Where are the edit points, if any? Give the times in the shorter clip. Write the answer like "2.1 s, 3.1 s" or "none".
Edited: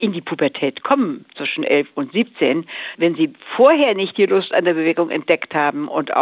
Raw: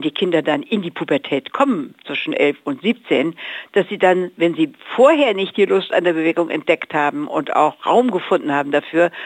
2.9 s